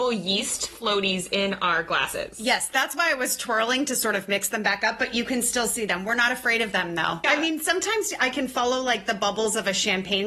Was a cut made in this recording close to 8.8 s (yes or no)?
no